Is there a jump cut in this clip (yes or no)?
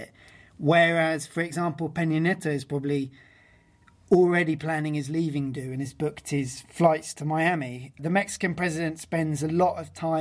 no